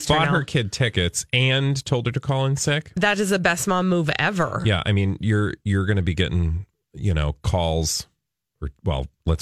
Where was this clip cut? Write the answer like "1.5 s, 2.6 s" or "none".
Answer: none

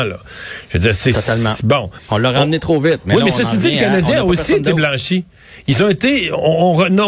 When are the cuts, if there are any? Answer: 2.0 s

